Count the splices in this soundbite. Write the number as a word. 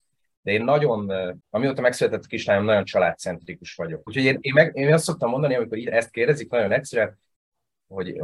two